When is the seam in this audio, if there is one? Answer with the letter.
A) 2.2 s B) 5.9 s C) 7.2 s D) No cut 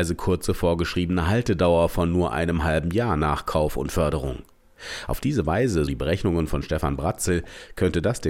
B